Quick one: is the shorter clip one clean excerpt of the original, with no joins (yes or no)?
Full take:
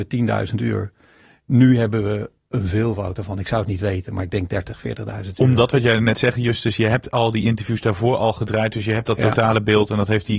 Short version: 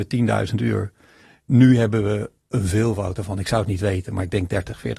yes